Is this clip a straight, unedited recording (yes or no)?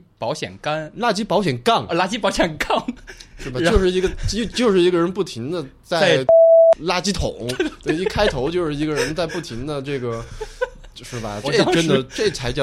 no